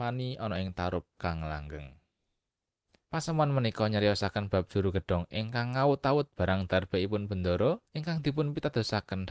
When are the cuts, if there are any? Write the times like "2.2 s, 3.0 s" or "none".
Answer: 3.0 s, 7.9 s